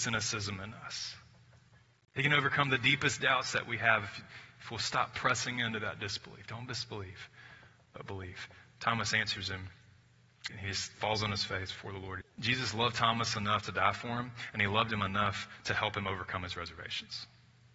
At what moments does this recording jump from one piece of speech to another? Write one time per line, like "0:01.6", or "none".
0:10.5
0:12.2